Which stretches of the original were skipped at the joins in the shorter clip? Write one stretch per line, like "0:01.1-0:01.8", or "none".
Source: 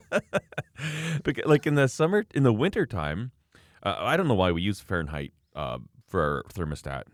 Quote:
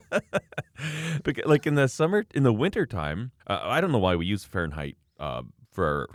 0:03.4-0:03.8